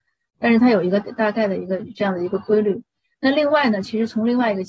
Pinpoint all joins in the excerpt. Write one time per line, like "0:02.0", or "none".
0:01.0